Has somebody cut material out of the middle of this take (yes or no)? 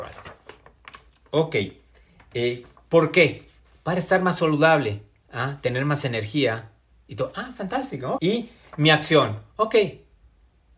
yes